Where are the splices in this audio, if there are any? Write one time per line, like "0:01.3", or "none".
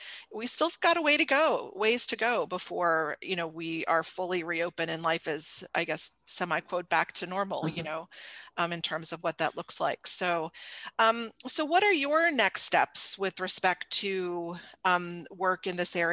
none